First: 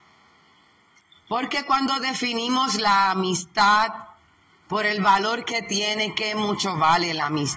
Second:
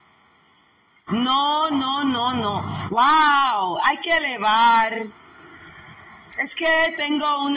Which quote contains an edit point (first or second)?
second